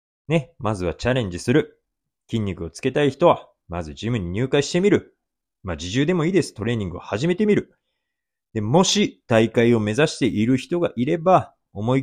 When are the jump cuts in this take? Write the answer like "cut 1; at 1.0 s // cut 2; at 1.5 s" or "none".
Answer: none